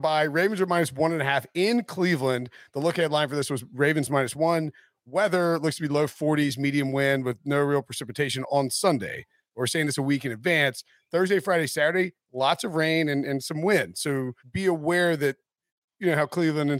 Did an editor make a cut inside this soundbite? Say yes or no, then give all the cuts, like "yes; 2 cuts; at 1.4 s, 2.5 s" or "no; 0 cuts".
yes; 1 cut; at 14.4 s